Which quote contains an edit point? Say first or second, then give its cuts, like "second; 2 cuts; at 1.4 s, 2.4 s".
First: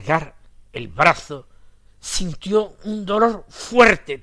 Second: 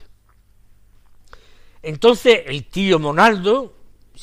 first; 1 cut; at 1.8 s